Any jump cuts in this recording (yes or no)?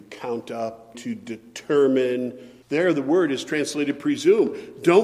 yes